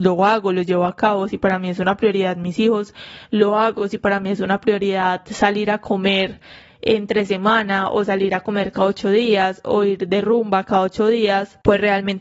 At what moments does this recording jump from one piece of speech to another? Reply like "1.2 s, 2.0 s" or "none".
none